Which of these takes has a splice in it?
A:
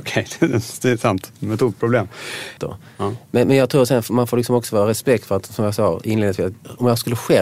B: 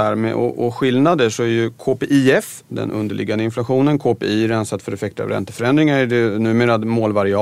A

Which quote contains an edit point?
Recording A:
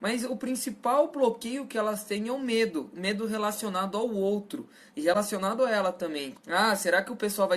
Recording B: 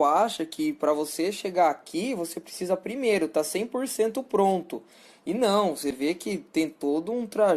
A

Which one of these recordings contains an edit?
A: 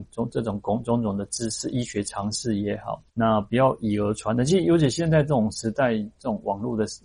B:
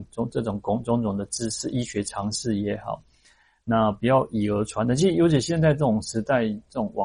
A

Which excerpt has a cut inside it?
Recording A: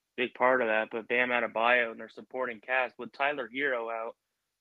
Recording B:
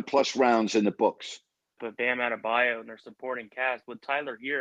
B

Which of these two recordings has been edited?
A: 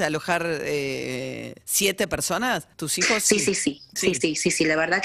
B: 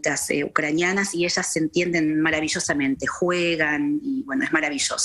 A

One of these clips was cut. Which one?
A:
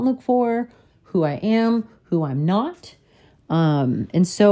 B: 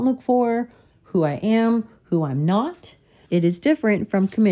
B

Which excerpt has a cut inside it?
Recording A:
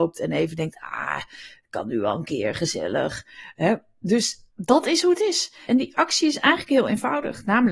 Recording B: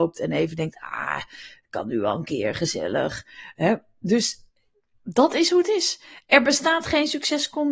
A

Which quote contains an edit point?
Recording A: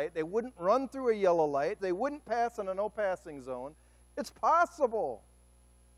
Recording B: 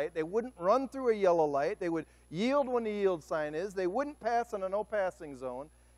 A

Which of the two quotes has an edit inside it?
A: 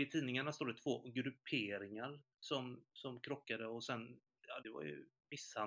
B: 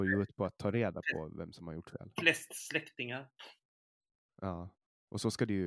A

